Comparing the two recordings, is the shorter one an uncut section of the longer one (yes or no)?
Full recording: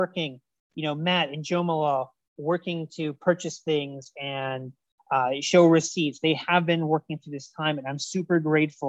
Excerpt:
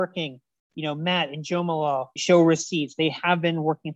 no